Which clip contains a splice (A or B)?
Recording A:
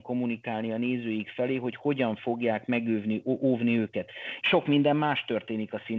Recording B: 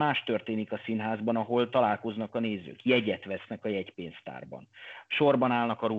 A